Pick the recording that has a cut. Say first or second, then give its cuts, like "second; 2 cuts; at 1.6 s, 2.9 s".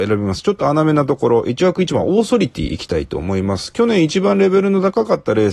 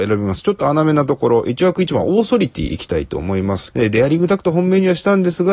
second; 1 cut; at 3.7 s